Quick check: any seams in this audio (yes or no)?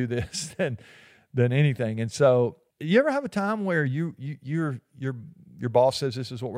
yes